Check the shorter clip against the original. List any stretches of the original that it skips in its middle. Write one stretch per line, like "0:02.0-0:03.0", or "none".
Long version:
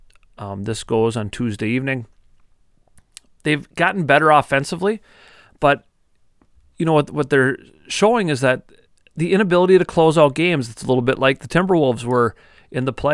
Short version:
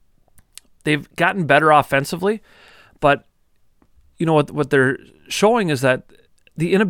none